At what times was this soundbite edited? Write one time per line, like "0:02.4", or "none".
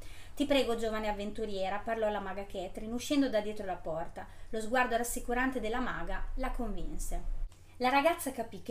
none

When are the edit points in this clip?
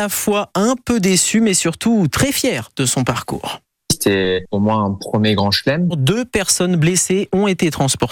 0:05.9

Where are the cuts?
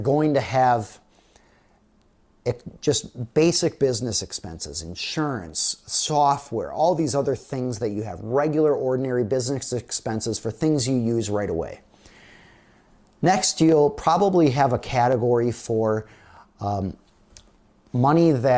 none

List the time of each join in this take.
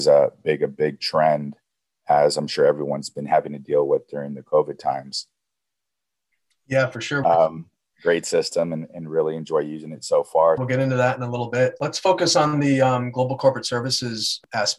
0:07.2
0:10.6

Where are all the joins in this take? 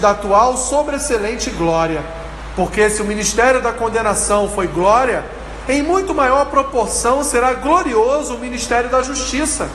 0:02.5

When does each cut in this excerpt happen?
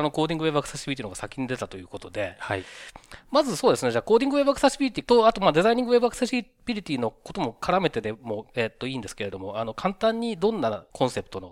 none

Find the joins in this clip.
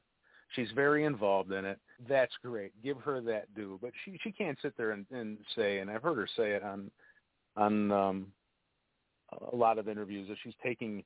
0:02.0

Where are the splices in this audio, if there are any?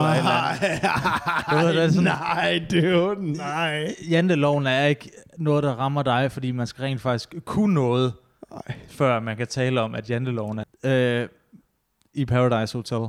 0:10.6

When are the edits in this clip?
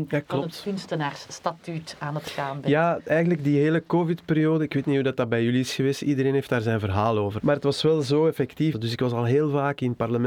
0:07.4
0:08.7

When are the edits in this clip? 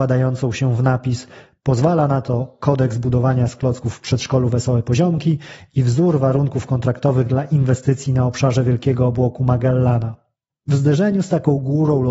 0:10.5

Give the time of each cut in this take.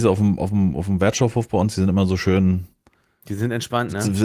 none

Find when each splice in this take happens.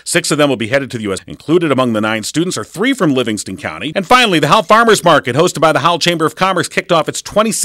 0:01.2
0:03.9

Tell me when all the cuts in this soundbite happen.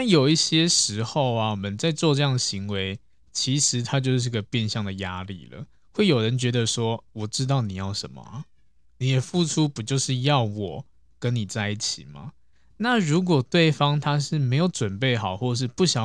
none

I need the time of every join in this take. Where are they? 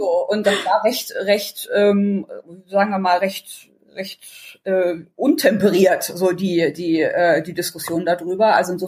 none

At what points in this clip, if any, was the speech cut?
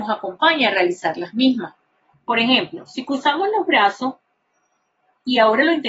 0:02.1

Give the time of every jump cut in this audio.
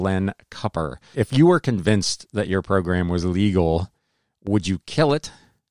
0:01.1

